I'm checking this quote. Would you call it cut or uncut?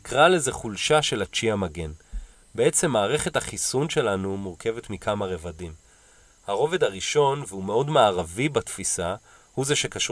uncut